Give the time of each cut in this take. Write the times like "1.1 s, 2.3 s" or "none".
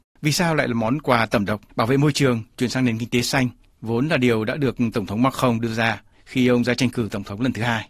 1.7 s